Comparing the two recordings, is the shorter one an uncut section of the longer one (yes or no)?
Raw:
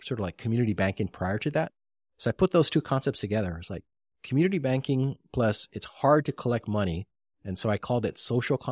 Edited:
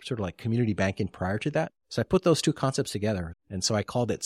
no